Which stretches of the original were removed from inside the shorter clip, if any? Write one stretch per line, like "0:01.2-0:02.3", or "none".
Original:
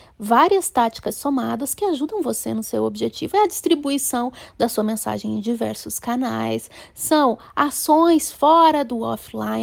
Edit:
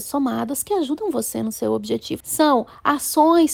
0:03.3-0:06.9